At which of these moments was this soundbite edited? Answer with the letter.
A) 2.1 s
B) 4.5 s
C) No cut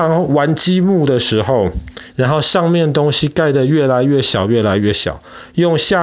A